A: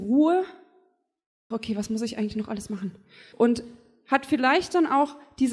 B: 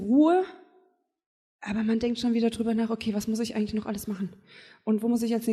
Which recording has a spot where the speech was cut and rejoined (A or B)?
A